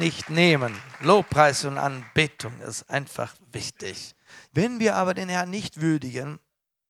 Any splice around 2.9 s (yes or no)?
no